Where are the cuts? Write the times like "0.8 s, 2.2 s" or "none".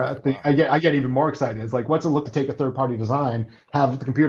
2.2 s

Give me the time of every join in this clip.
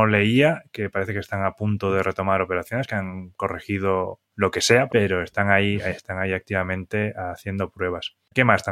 4.9 s

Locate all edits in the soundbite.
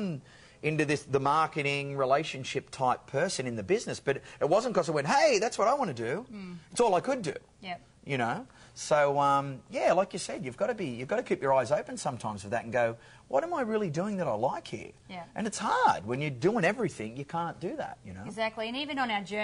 none

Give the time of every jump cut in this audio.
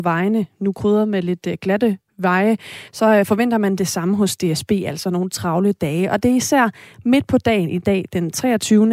none

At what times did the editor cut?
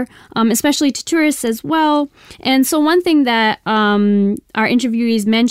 2.3 s

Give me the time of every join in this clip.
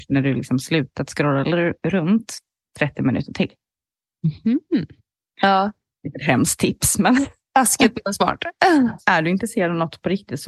5.3 s, 9.0 s

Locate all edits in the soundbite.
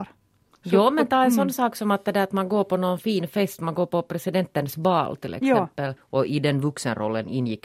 6.0 s

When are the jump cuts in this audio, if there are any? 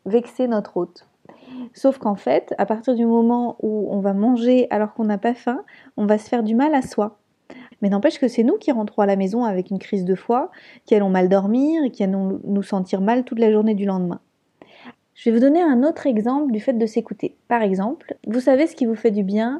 7.7 s, 14.9 s, 18.2 s

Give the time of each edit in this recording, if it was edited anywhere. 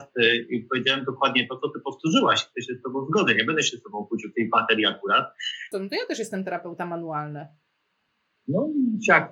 4.3 s, 5.7 s

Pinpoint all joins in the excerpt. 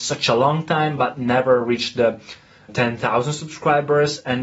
2.7 s

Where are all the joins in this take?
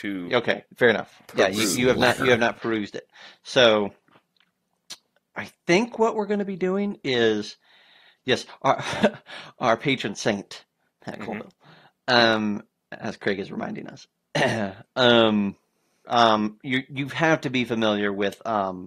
14.1 s, 16.0 s

